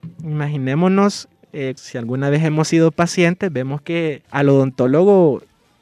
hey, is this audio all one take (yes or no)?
no